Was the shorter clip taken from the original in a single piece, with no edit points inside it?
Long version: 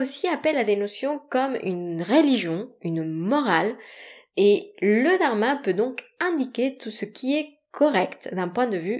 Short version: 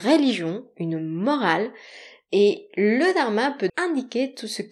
no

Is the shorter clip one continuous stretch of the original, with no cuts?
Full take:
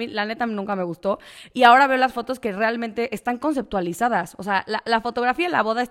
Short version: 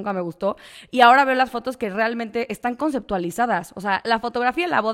no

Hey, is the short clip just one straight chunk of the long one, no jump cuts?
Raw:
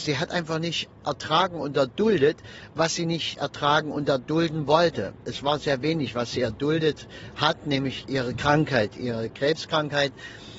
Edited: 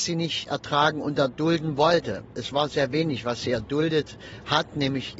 yes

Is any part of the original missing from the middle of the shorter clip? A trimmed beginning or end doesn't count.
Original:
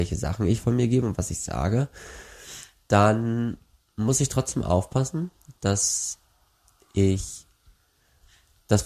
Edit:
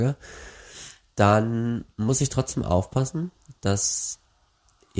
yes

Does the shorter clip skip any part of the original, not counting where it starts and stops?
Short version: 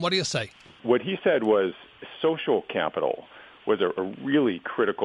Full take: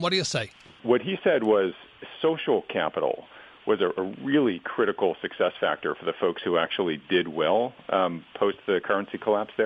no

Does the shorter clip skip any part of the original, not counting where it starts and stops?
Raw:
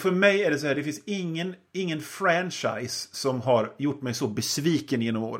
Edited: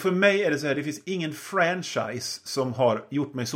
yes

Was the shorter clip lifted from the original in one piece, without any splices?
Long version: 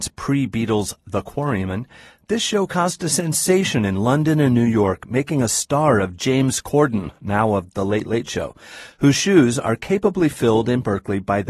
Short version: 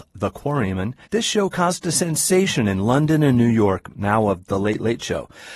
no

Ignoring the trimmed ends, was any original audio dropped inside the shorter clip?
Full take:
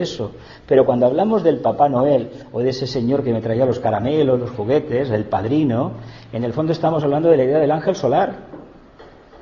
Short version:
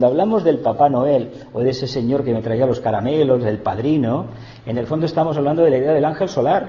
yes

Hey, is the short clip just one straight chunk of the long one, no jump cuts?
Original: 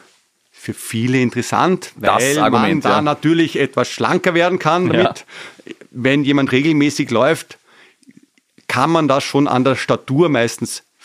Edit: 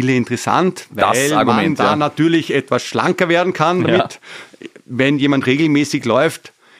yes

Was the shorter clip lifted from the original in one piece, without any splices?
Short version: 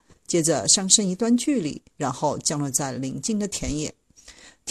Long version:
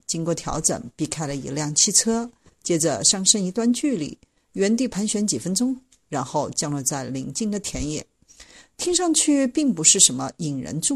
no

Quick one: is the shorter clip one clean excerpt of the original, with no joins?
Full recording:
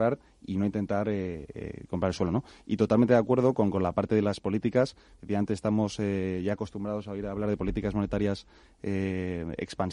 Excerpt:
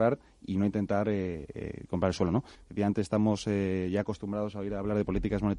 no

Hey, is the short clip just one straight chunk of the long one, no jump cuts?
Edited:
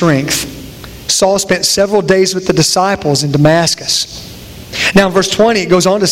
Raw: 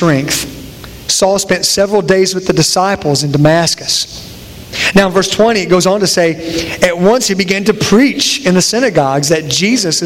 yes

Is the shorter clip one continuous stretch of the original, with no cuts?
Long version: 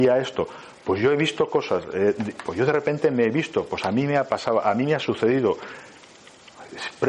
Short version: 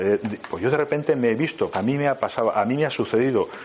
no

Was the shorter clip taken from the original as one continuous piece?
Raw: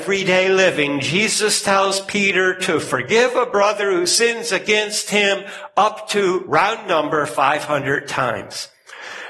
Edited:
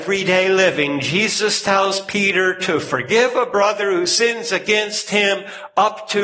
yes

